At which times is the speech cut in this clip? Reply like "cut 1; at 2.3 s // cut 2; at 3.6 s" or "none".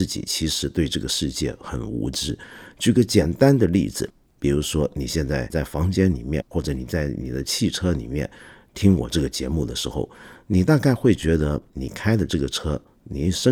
none